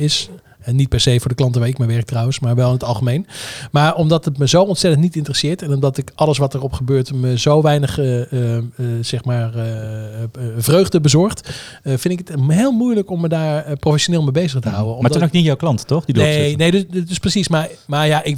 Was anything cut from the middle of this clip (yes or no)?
no